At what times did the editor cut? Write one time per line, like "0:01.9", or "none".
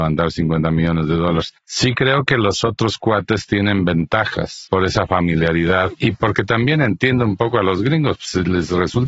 0:05.9